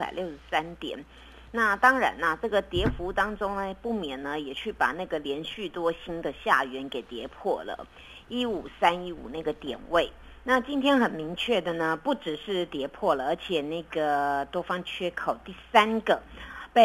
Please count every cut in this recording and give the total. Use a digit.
0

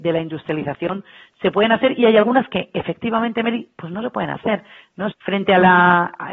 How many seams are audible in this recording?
1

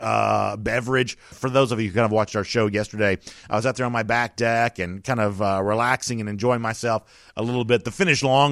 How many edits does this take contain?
1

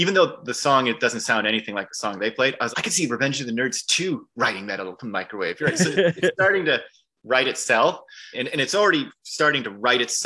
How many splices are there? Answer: 2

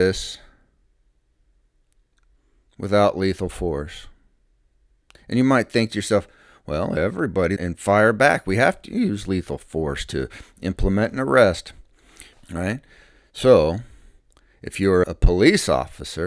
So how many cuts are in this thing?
3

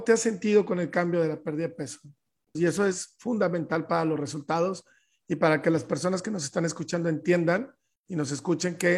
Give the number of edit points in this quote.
1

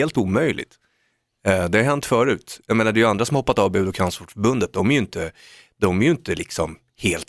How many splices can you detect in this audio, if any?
0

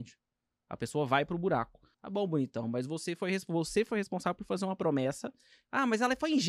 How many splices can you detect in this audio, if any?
1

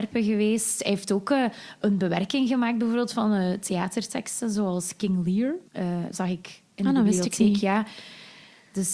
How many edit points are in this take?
1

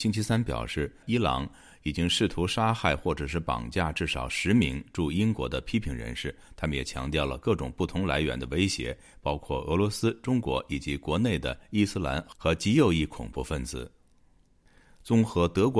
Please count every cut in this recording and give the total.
1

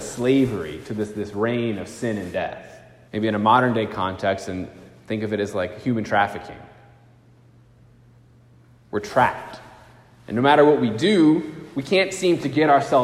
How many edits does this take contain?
1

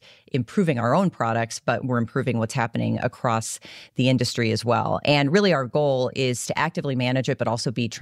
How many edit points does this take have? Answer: 1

